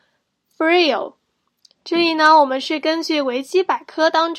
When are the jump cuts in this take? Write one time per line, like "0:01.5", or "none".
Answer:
0:01.7